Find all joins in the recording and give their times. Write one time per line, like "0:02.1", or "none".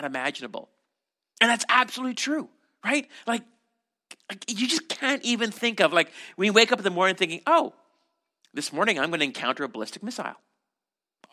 none